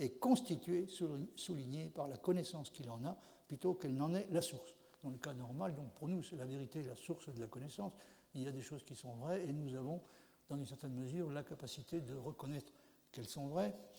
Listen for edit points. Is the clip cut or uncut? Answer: uncut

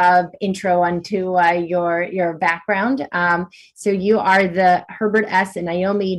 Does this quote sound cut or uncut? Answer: uncut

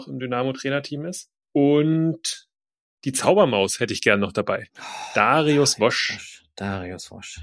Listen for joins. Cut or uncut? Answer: uncut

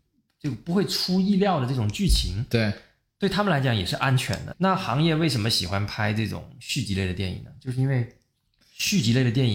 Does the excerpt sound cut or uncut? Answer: cut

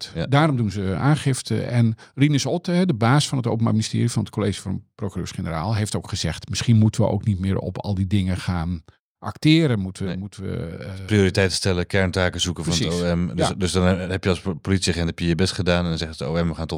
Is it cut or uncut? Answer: uncut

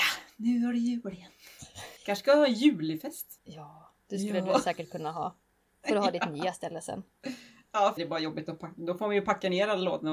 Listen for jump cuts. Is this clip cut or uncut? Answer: cut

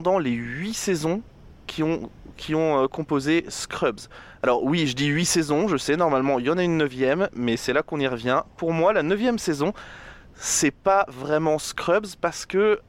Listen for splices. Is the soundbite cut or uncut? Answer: uncut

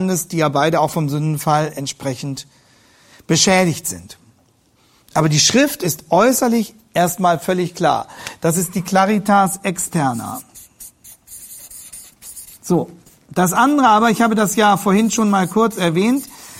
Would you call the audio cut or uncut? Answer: uncut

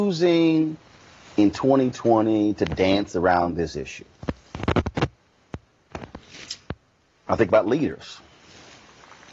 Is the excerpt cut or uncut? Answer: uncut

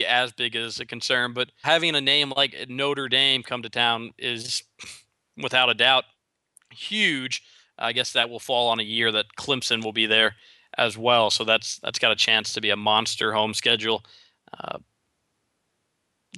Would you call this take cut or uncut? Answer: cut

